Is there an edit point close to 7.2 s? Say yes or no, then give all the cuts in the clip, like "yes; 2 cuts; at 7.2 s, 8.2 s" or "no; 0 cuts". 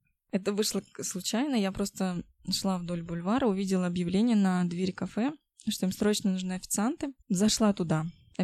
yes; 1 cut; at 7.2 s